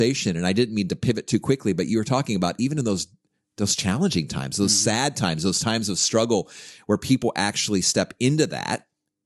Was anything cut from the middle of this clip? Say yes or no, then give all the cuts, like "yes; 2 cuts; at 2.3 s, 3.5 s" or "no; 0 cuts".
no; 0 cuts